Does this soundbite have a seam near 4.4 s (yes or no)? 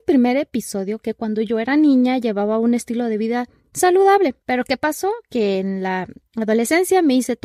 yes